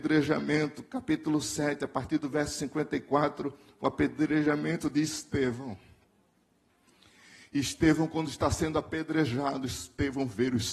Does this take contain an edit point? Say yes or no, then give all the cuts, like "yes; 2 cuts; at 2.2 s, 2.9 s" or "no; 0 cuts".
no; 0 cuts